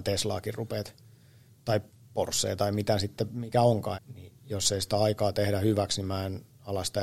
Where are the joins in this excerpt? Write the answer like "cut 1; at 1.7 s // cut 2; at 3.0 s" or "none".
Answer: cut 1; at 3.9 s